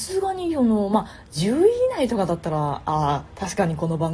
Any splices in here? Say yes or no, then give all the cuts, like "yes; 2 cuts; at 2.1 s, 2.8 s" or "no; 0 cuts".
no; 0 cuts